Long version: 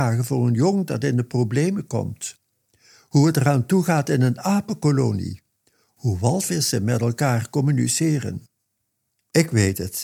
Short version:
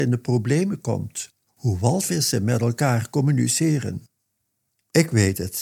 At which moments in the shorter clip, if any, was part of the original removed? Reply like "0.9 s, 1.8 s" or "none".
1.5 s